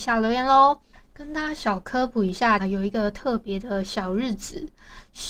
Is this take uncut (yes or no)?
no